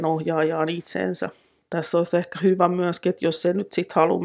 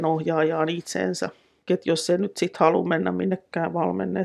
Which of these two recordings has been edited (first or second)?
second